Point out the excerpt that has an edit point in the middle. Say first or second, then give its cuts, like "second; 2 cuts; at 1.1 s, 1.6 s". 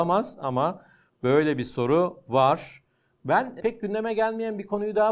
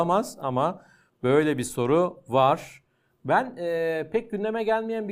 first; 1 cut; at 3.6 s